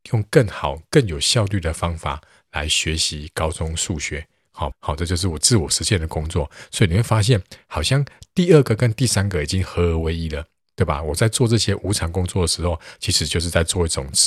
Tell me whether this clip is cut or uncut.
cut